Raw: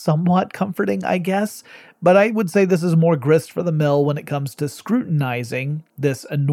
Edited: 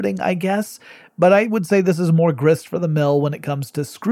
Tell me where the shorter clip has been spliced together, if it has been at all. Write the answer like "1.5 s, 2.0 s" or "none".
none